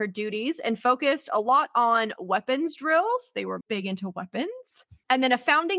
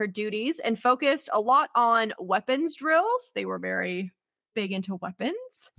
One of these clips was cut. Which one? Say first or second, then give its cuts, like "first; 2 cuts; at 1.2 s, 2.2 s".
first; 1 cut; at 3.6 s